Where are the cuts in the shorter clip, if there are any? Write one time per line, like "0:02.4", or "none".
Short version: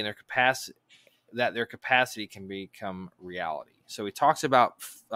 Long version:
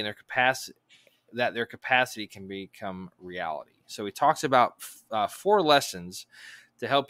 none